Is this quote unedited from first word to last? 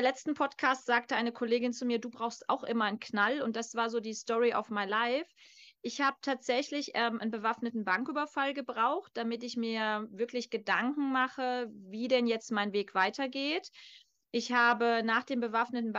yes; 0 cuts

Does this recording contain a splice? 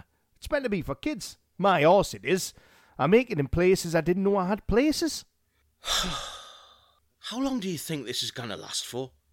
no; 0 cuts

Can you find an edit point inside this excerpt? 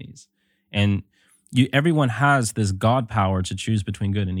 no; 0 cuts

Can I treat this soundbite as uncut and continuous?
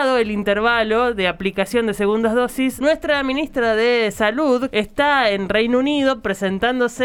no; 2 cuts; at 2.8 s, 4.7 s

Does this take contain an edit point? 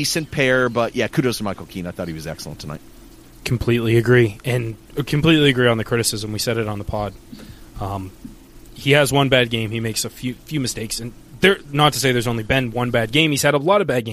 no; 0 cuts

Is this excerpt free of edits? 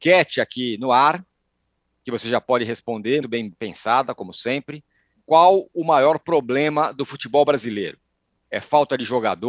no; 2 cuts; at 3.2 s, 5.2 s

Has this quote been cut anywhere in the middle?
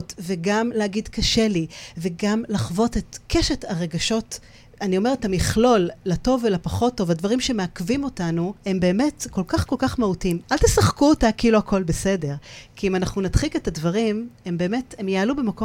yes; 2 cuts; at 8.6 s, 10.4 s

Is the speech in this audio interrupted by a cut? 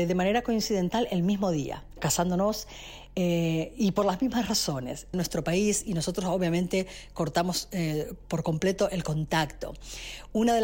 yes; 2 cuts; at 2.0 s, 5.1 s

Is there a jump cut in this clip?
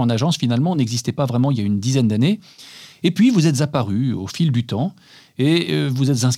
no; 0 cuts

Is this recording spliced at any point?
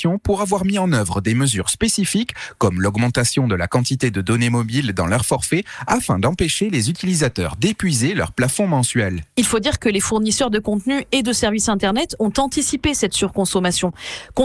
no; 0 cuts

